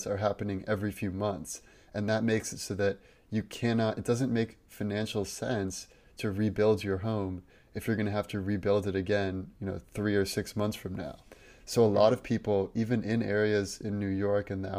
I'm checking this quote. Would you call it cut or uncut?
uncut